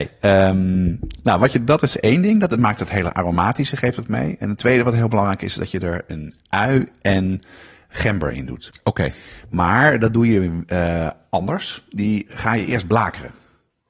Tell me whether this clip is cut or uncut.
uncut